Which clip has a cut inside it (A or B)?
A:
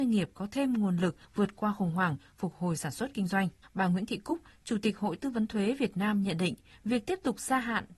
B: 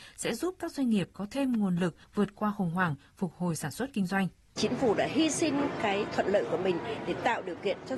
A